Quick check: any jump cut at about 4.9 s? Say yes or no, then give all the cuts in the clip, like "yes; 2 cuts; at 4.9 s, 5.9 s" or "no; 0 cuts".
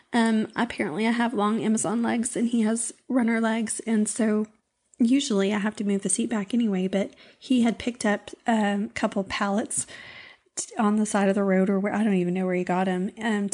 no; 0 cuts